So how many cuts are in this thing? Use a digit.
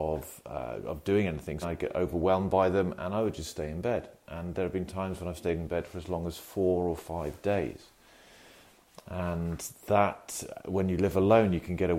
1